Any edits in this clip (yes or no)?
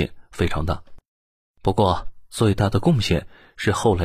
no